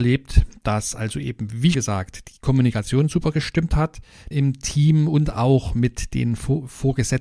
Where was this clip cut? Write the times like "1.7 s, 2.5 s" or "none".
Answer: 1.7 s, 4.3 s